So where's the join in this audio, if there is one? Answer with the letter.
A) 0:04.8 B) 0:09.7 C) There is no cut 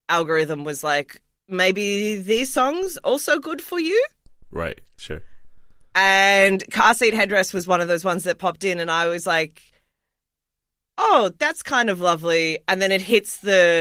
C